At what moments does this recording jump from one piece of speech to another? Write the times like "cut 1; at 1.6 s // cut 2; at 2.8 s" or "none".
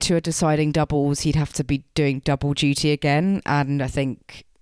none